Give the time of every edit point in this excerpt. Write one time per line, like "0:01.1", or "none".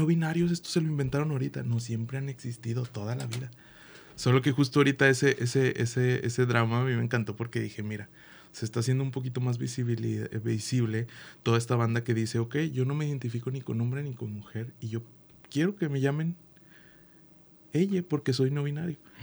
none